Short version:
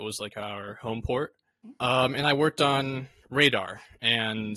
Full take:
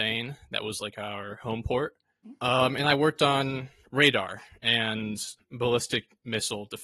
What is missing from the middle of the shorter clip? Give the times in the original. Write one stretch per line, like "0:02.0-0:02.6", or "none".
none